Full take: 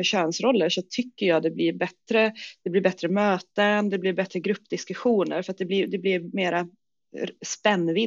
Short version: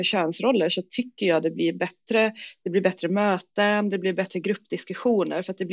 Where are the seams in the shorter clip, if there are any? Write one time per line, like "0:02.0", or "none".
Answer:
none